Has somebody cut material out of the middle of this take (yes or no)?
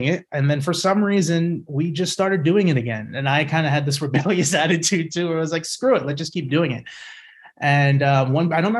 no